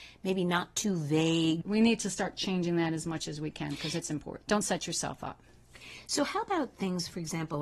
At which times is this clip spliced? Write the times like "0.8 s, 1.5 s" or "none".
1.6 s, 4.4 s